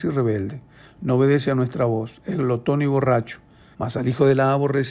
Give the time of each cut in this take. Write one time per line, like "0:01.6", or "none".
0:03.7